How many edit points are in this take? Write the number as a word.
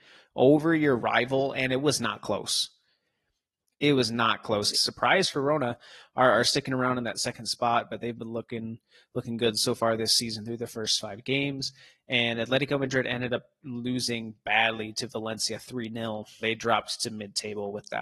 two